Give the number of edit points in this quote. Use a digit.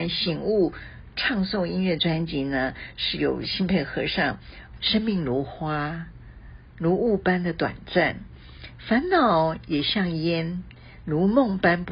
1